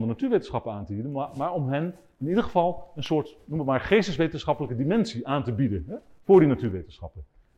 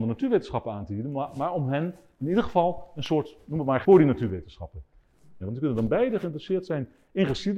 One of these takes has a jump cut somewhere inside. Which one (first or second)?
second